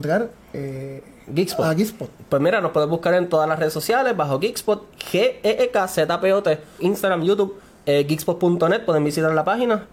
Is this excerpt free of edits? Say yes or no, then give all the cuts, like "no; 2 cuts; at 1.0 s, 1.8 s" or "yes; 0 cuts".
no; 1 cut; at 6.8 s